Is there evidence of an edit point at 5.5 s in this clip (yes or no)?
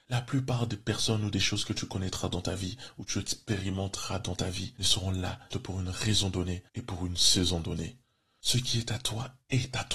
yes